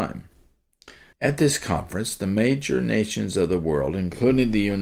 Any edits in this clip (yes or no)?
yes